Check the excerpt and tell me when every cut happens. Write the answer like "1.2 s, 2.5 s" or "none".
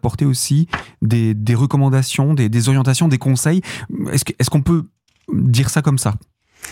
none